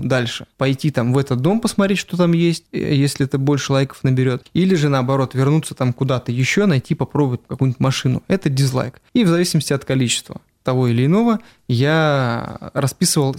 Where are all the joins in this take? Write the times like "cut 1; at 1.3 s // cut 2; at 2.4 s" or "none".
none